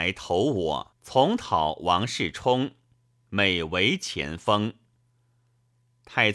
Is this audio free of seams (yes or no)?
no